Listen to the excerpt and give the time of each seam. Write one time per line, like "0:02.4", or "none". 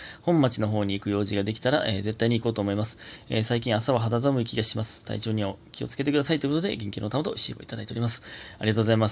none